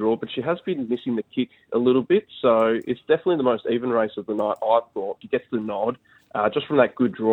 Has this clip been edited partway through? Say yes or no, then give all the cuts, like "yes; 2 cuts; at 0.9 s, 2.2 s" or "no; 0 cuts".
yes; 1 cut; at 5.2 s